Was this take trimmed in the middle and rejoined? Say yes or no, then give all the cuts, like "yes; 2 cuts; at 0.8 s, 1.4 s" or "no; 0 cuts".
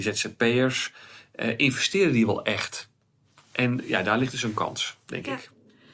no; 0 cuts